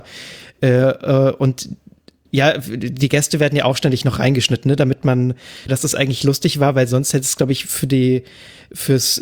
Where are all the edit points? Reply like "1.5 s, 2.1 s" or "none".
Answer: 5.7 s